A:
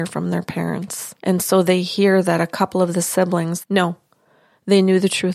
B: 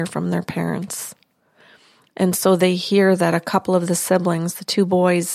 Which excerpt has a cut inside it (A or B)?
A